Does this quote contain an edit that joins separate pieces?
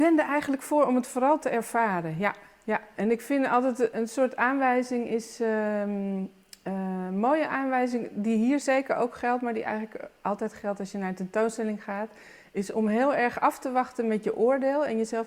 no; 0 cuts

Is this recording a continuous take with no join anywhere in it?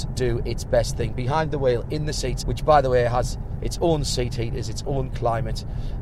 no; 1 cut; at 2.4 s

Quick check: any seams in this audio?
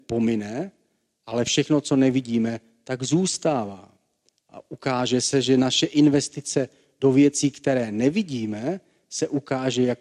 no; 0 cuts

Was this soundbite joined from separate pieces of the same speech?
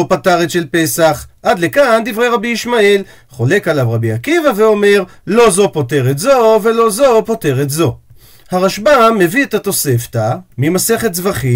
yes; 1 cut; at 10.5 s

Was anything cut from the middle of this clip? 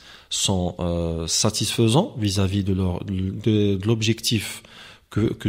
no; 0 cuts

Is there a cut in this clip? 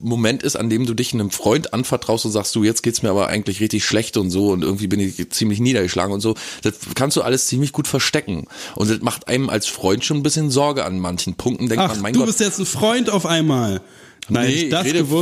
no; 0 cuts

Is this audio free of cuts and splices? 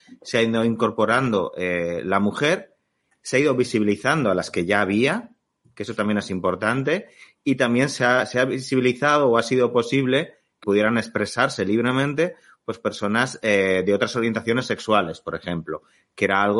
no; 1 cut; at 10.6 s

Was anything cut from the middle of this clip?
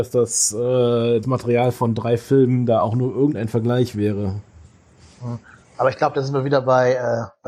yes; 1 cut; at 1.2 s

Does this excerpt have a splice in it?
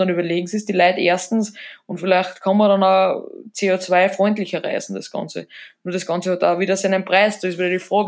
no; 0 cuts

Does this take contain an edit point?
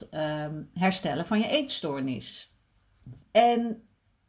yes; 1 cut; at 3.2 s

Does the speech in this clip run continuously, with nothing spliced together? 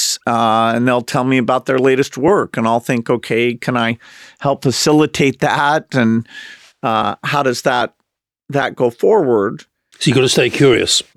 yes; 0 cuts

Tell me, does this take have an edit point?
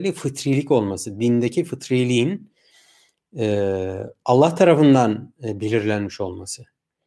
no; 0 cuts

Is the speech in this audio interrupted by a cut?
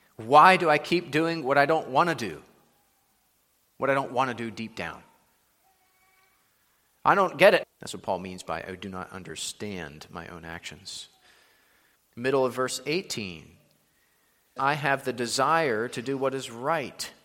yes; 3 cuts; at 7.6 s, 12.0 s, 14.6 s

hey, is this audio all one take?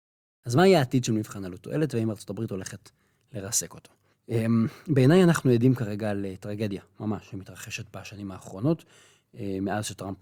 yes; 0 cuts

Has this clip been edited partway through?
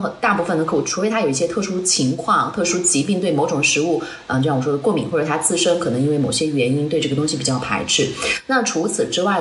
no; 0 cuts

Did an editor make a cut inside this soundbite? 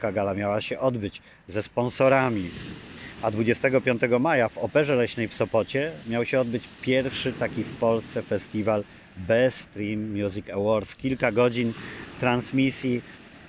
yes; 1 cut; at 3.2 s

